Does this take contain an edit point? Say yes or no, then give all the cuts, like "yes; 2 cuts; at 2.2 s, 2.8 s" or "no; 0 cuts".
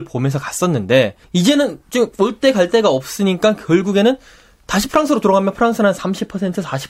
yes; 1 cut; at 1.2 s